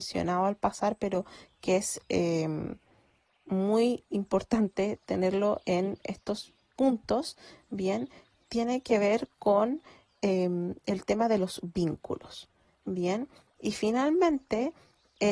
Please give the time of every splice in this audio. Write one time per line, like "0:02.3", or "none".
0:12.7